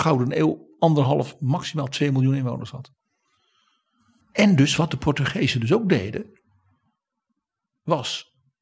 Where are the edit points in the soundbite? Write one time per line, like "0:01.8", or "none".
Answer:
0:04.2